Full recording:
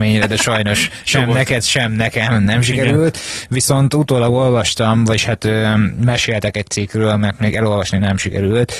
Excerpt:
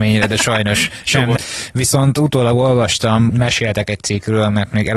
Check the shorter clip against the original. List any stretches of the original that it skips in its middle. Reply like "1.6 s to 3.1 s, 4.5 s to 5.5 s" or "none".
1.4 s to 3.1 s, 5.1 s to 6.0 s